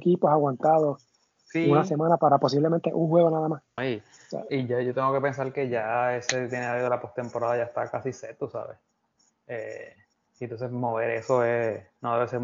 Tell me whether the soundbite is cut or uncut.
cut